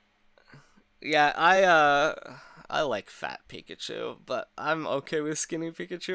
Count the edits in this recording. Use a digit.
0